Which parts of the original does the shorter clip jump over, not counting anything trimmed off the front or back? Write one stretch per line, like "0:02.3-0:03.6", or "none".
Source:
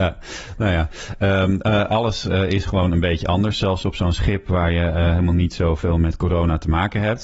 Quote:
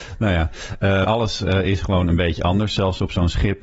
0:01.4-0:01.9

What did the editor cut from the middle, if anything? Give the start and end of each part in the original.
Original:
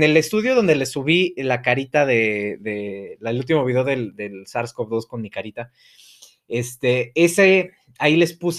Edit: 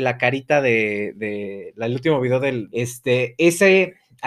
0:04.1-0:06.5

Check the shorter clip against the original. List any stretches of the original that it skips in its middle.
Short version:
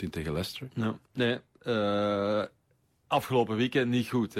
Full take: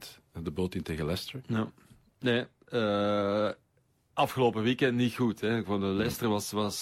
0:01.8-0:02.1

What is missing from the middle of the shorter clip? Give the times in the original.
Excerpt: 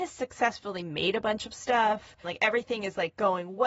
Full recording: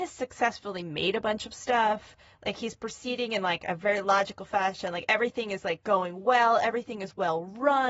0:02.2-0:04.9

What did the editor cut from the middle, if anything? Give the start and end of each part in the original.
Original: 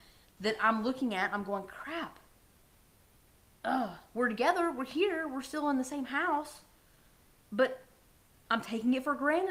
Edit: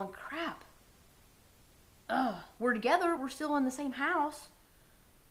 0:04.7-0:05.3

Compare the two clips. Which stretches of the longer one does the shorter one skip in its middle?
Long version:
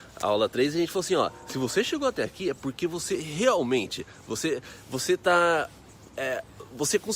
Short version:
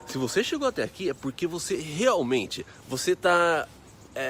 0:04.2-0:04.8

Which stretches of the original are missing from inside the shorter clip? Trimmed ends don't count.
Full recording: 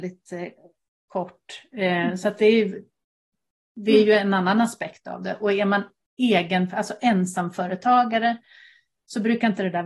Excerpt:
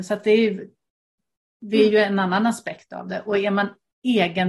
none

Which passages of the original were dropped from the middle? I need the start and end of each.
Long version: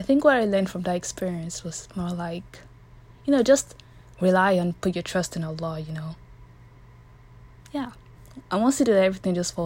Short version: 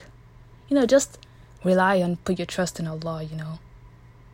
none

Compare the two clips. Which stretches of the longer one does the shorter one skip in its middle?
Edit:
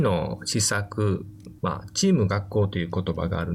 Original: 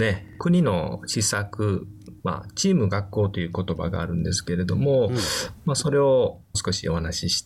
none

